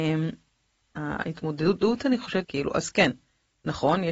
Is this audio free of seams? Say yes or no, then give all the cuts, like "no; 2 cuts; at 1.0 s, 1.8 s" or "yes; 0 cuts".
no; 2 cuts; at 0.9 s, 2.4 s